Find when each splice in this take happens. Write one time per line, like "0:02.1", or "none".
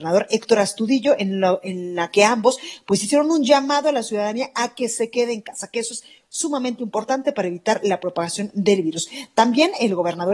none